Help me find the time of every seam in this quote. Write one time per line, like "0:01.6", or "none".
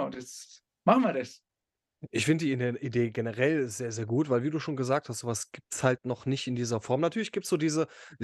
none